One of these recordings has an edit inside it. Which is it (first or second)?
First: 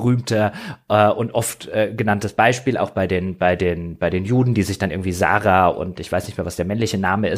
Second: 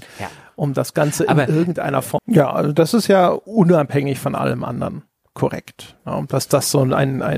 second